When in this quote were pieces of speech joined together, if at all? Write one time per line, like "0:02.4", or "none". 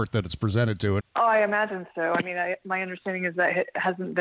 0:01.0

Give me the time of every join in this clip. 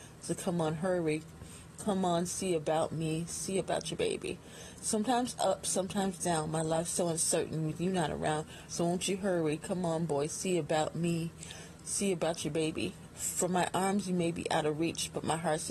0:08.7
0:13.1

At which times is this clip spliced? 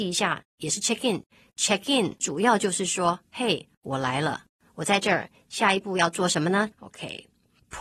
0:06.7

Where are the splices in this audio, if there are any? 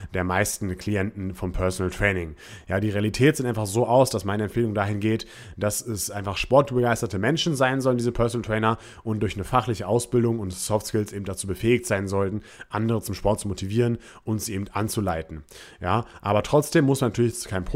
none

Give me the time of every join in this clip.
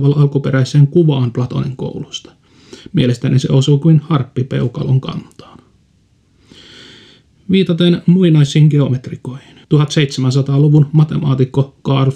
none

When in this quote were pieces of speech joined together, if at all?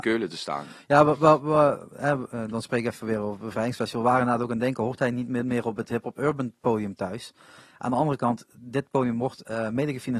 none

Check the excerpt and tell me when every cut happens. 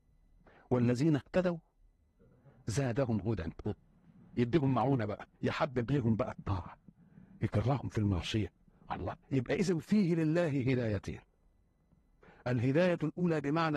0:05.3
0:09.2

